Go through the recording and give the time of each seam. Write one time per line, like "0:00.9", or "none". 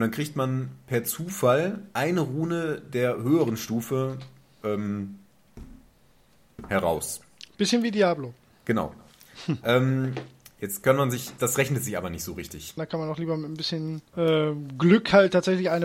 0:11.4
0:12.8
0:14.1